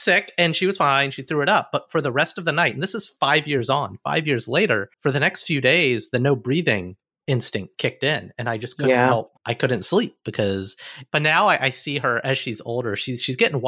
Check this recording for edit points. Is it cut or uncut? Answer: cut